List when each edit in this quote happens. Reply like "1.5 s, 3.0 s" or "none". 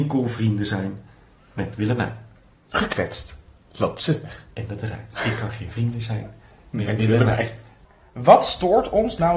none